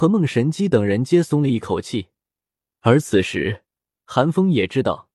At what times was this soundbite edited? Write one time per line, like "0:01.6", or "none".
0:02.7